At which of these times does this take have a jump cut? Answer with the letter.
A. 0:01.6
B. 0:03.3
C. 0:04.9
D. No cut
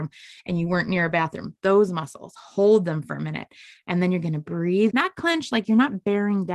C